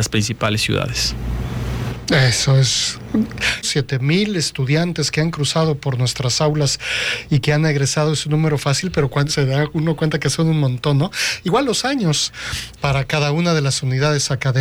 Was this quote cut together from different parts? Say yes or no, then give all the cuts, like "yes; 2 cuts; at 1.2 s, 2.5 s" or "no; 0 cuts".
yes; 3 cuts; at 3.6 s, 9.3 s, 12.8 s